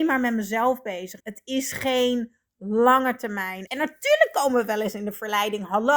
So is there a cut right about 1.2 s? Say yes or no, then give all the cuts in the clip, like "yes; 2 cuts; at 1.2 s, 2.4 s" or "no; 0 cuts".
yes; 2 cuts; at 1.2 s, 3.7 s